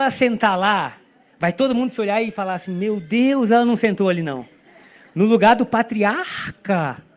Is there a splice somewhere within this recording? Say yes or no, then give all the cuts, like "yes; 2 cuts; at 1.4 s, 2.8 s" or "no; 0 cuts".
no; 0 cuts